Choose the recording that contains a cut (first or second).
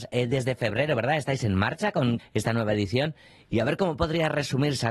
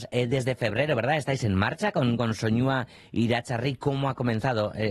first